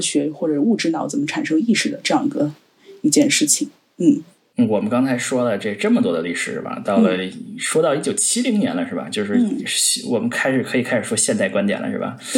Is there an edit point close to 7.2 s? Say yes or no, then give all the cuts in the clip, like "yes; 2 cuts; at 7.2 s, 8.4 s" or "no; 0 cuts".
no; 0 cuts